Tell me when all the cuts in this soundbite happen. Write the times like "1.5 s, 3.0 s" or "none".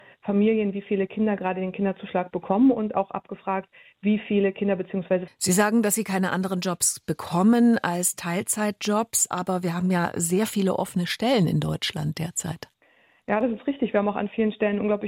5.3 s

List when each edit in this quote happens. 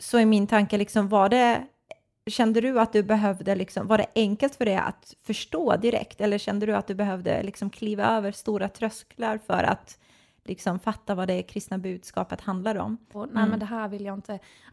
13.1 s

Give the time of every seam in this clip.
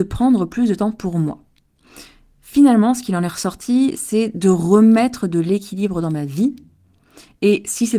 none

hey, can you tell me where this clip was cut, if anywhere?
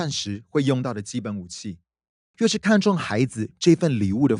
2.3 s

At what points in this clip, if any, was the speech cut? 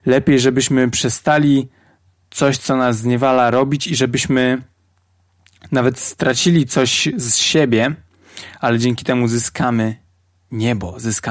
none

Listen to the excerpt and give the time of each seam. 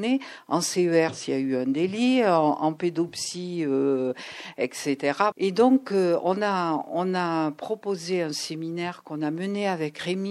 5.3 s

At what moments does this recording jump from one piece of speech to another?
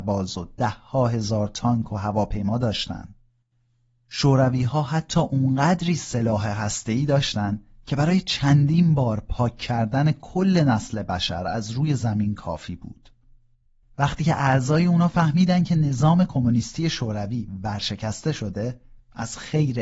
13.8 s

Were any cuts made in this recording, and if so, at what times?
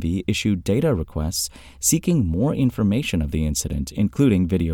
none

